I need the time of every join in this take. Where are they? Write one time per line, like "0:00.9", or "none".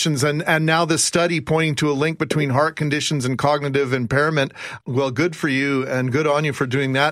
0:04.8

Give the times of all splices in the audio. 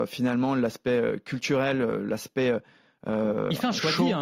none

